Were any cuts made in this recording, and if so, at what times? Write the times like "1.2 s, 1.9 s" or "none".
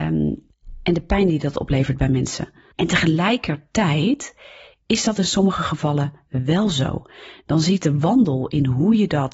2.7 s

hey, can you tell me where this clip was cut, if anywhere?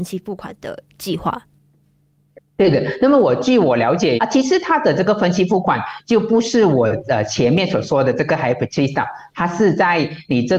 4.2 s

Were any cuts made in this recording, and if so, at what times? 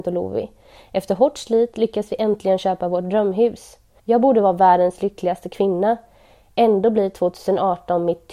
4.0 s

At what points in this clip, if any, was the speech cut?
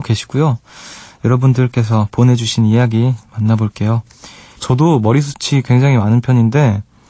4.5 s

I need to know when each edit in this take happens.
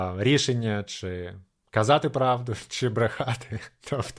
none

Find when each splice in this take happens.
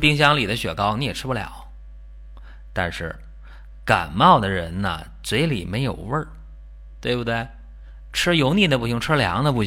none

